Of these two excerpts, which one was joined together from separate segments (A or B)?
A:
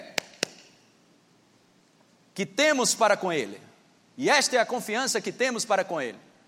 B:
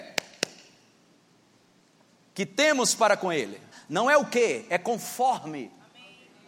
B